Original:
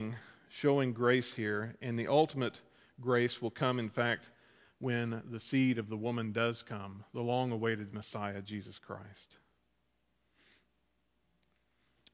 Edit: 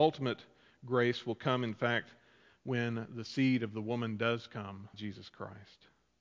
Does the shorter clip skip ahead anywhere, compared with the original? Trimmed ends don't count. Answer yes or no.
yes